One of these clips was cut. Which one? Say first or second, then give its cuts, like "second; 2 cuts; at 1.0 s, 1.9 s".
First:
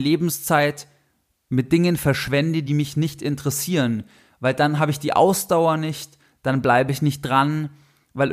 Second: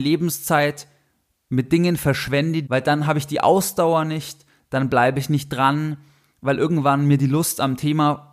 second; 1 cut; at 2.7 s